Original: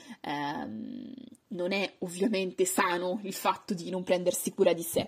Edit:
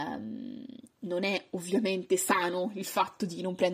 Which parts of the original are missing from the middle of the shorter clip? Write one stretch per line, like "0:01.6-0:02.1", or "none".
none